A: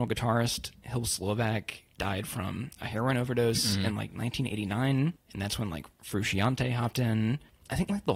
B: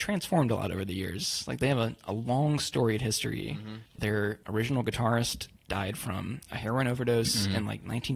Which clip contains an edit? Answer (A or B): B